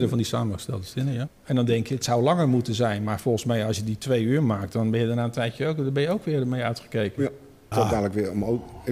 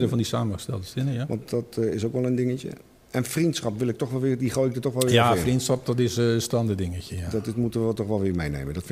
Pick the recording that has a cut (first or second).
first